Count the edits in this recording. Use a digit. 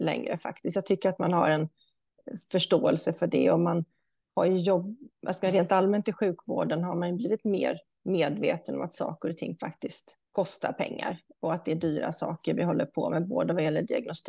2